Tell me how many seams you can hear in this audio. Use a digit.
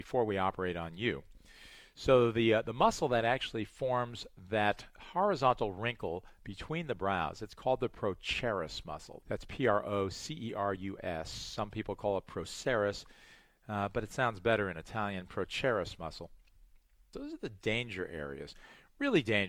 2